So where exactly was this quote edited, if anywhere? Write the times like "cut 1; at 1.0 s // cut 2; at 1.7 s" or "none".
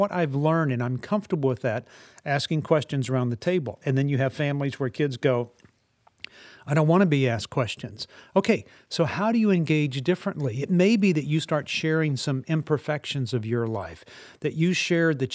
none